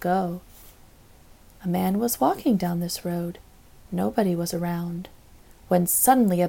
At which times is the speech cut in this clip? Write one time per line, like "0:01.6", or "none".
none